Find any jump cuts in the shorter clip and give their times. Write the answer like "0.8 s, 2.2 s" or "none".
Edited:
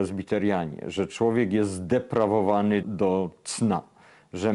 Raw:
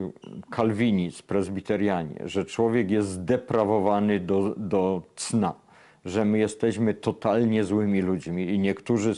2.8 s